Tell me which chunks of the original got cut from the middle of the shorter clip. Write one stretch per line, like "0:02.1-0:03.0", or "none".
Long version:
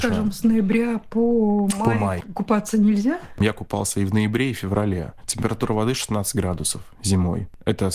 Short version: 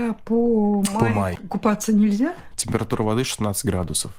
0:03.4-0:05.2